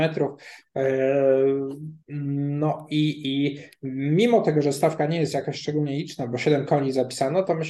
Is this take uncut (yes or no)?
no